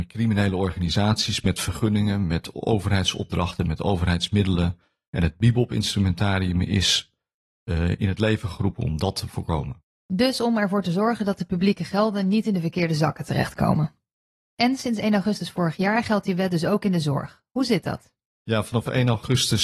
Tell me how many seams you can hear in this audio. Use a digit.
1